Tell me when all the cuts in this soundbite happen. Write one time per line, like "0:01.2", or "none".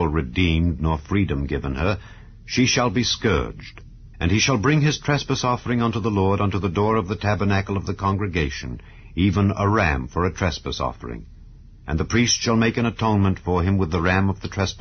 0:04.1